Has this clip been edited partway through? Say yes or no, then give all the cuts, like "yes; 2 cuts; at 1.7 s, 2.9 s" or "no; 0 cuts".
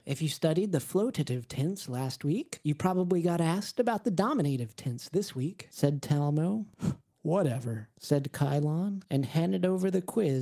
no; 0 cuts